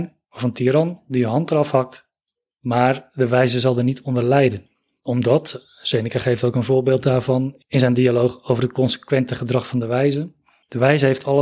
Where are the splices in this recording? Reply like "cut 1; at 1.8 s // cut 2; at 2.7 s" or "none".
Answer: none